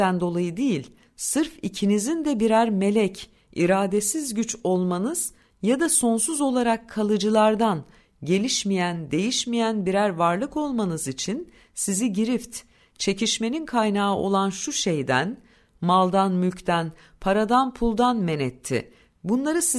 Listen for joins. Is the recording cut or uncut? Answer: uncut